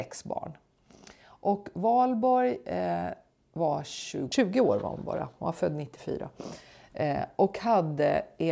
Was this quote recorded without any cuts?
yes; 0 cuts

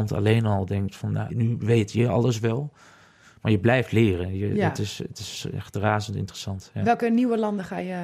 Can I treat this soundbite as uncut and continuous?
no; 1 cut; at 1.3 s

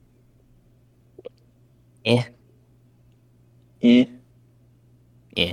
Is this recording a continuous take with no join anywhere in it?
yes; 0 cuts

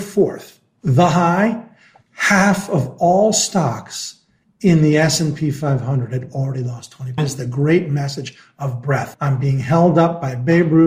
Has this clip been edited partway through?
yes; 2 cuts; at 7.2 s, 9.1 s

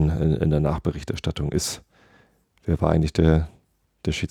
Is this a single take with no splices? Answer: yes; 0 cuts

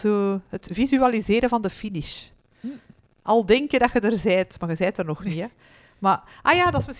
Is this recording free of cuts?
yes; 0 cuts

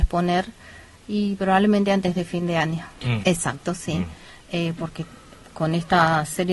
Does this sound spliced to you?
yes; 1 cut; at 3.2 s

